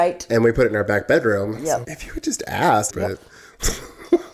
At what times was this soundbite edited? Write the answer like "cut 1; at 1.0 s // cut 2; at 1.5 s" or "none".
cut 1; at 1.8 s // cut 2; at 2.9 s